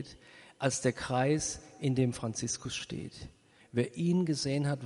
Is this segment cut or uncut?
cut